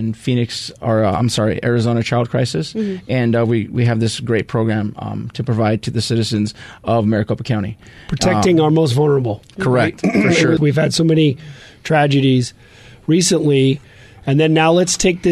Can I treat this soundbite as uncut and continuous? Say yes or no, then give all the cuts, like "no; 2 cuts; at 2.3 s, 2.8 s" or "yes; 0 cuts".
no; 1 cut; at 10.6 s